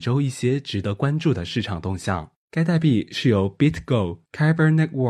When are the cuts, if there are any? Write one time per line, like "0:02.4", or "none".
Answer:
0:02.4